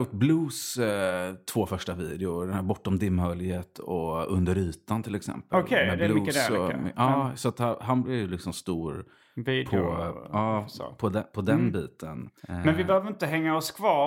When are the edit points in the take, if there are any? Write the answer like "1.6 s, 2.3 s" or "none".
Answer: 12.4 s